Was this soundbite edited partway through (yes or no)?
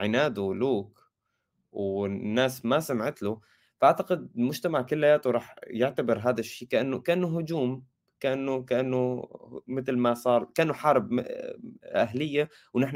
no